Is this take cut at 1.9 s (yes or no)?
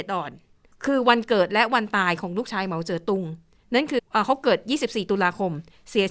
no